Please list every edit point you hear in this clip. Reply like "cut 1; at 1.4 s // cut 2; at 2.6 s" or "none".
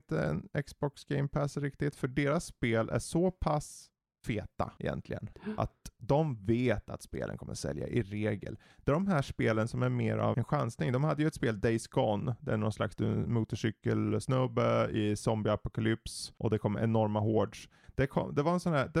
cut 1; at 10.3 s

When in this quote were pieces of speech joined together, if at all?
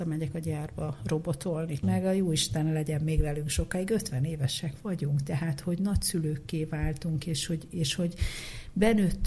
cut 1; at 1.8 s

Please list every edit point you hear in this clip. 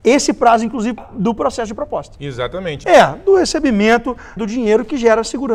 cut 1; at 1.0 s // cut 2; at 2.8 s // cut 3; at 4.4 s

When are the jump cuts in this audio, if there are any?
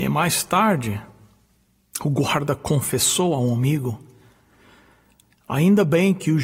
none

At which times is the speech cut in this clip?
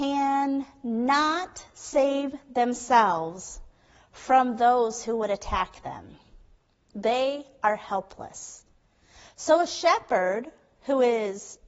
none

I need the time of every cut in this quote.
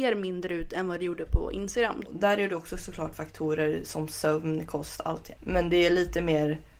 cut 1; at 2.0 s // cut 2; at 5.4 s

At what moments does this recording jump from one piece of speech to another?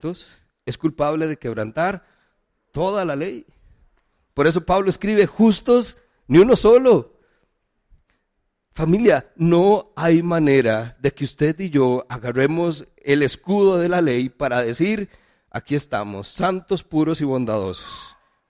none

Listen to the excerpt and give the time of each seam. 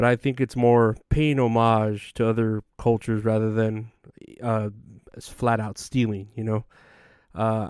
none

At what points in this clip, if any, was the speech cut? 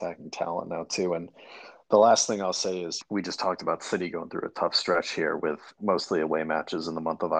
cut 1; at 3.0 s // cut 2; at 5.8 s

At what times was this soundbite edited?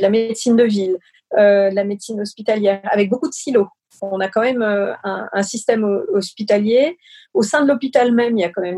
none

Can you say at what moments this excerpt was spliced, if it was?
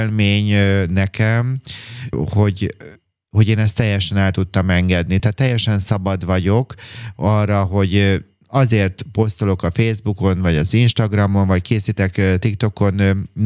none

